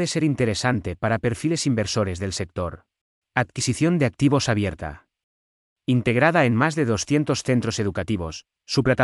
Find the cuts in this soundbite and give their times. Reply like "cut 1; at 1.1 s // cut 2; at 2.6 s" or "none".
cut 1; at 3.2 s // cut 2; at 5.7 s